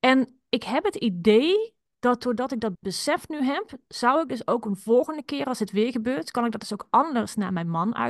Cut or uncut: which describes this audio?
uncut